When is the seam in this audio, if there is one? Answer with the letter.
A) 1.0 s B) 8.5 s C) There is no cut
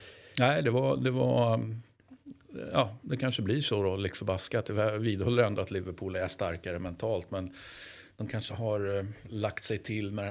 B